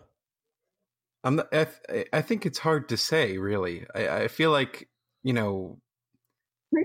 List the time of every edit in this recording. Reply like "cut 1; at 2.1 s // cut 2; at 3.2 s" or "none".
none